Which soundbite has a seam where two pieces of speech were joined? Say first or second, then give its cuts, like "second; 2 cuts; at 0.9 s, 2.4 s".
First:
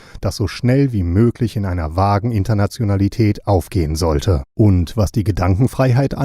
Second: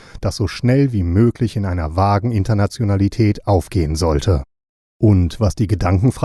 first; 1 cut; at 4.5 s